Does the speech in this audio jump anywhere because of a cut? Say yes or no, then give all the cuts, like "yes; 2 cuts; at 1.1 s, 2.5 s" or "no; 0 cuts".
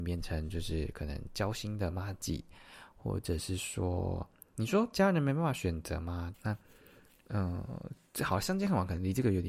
yes; 1 cut; at 6.3 s